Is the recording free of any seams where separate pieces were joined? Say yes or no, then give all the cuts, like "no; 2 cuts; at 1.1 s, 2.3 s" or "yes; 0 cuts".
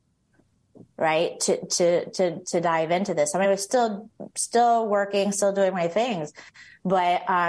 yes; 0 cuts